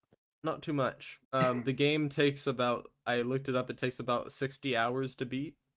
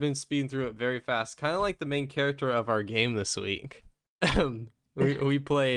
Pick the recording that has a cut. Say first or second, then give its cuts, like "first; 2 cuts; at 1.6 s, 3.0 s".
first; 1 cut; at 1.2 s